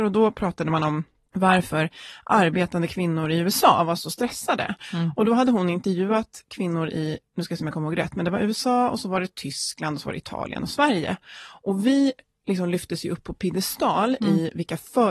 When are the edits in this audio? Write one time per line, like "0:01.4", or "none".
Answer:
none